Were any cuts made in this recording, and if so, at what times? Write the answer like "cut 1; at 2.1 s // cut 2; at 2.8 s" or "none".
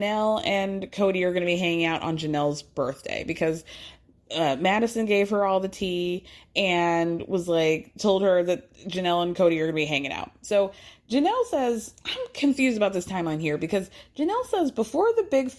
none